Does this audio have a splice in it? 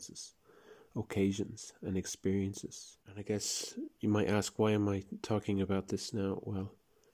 yes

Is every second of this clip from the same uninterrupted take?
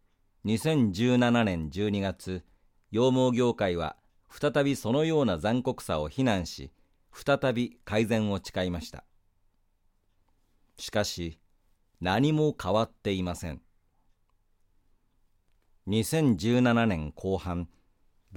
yes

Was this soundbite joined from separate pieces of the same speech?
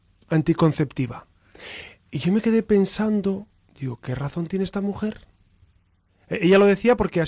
no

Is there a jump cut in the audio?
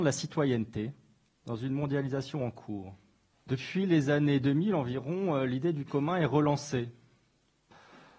yes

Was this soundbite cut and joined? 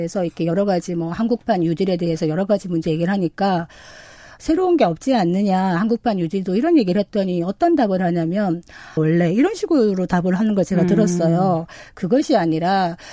yes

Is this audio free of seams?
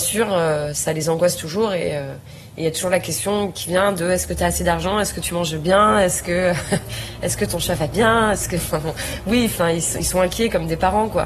yes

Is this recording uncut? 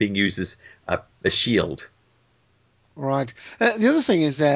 yes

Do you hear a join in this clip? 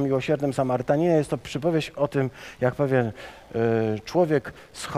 no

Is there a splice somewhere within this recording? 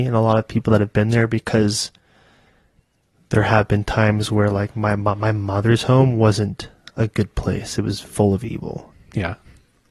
yes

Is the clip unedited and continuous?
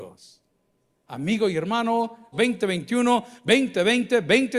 no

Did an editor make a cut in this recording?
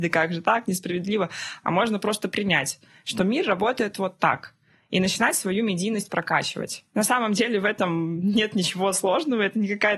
no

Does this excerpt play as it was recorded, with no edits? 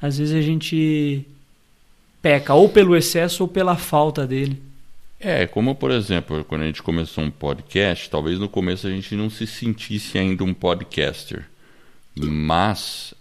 yes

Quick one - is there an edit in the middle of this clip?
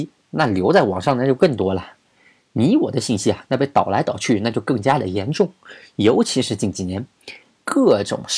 no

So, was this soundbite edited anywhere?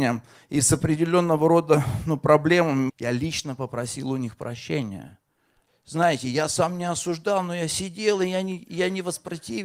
yes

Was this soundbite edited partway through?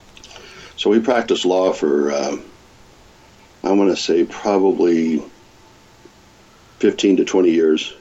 no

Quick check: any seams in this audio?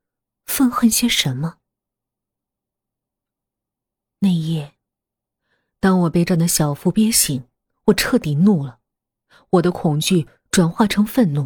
yes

